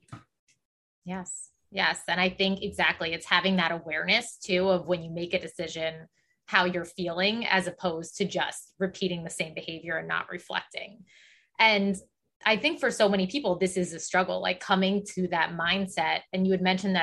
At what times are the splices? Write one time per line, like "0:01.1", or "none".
none